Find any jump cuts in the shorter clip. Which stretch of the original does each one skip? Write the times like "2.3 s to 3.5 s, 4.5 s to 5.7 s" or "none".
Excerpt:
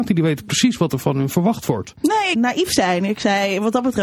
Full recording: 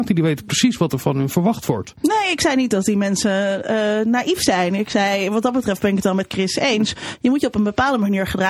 2.3 s to 4.0 s

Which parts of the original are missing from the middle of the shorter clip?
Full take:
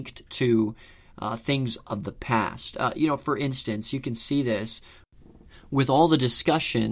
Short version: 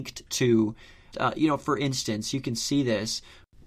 1.1 s to 2.7 s

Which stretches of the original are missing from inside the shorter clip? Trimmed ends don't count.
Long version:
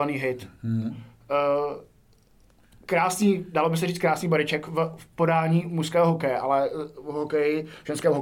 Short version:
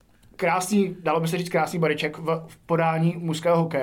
none

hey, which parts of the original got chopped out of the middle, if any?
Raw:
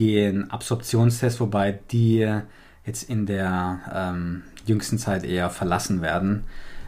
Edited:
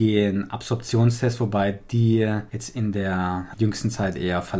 2.5 s to 2.8 s, 3.9 s to 4.6 s

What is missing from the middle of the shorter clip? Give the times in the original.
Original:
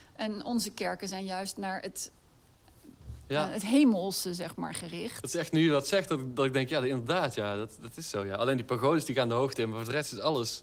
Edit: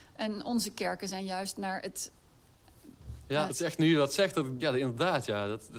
3.5 s to 5.2 s, 6.3 s to 6.7 s

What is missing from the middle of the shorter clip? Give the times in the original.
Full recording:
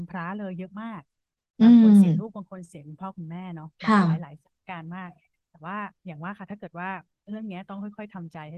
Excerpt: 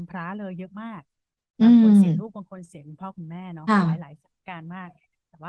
3.7 s to 3.9 s

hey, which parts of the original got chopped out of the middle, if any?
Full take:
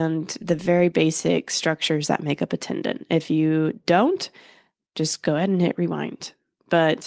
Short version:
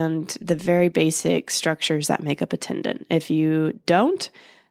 none

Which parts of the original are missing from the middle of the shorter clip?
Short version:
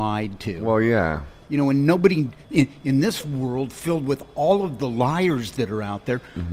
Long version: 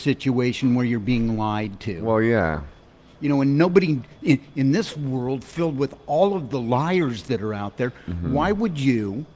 2.8 s to 3.1 s

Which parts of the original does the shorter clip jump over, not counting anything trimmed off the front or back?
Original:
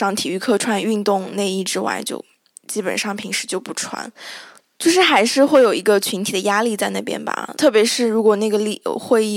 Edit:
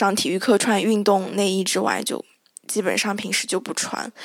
none

